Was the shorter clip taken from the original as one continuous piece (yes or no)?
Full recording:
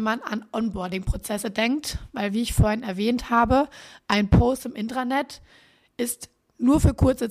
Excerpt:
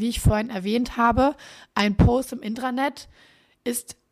yes